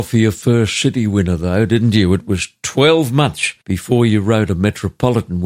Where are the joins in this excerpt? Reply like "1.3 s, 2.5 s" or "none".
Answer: 3.6 s